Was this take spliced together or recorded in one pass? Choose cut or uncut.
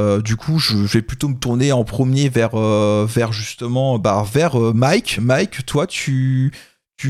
uncut